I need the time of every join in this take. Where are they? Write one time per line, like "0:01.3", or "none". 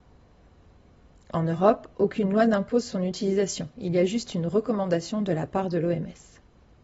none